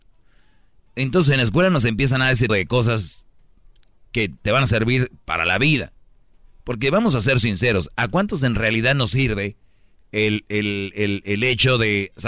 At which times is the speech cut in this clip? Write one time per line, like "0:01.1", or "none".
0:02.5